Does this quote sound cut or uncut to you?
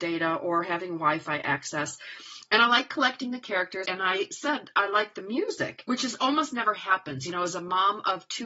cut